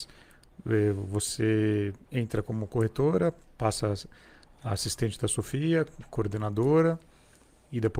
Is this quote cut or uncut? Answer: cut